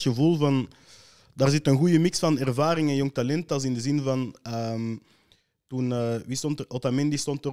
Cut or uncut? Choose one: uncut